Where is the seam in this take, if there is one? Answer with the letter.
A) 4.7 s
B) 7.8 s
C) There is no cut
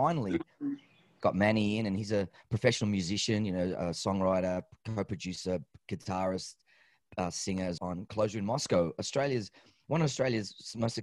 B